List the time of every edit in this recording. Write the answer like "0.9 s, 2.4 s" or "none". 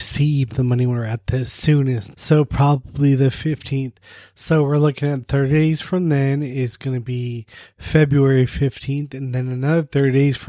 2.1 s